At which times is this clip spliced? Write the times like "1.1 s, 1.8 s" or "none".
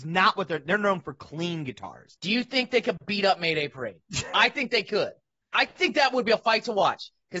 2.2 s